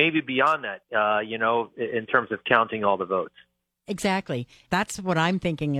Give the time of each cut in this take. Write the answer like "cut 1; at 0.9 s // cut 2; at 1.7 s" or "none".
cut 1; at 4.7 s